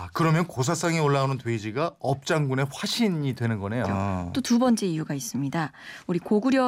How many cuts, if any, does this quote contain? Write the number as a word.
one